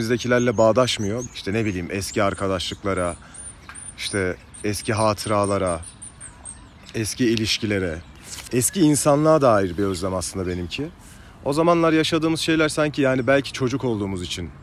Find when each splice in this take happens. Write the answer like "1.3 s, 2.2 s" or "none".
1.3 s